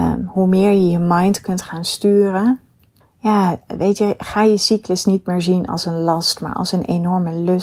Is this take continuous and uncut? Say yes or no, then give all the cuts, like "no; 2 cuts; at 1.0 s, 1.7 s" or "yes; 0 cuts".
no; 1 cut; at 3.0 s